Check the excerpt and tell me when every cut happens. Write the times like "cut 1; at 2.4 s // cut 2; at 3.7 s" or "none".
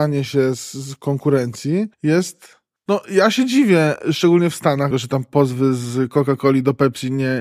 cut 1; at 1.9 s // cut 2; at 4.9 s